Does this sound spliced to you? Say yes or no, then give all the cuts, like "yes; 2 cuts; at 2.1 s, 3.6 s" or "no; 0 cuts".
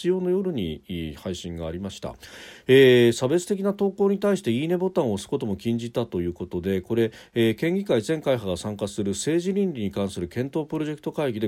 no; 0 cuts